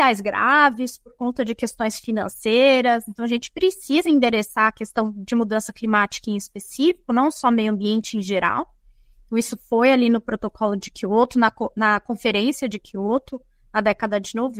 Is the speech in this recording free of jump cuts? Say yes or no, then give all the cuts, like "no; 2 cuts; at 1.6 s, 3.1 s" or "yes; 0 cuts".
yes; 0 cuts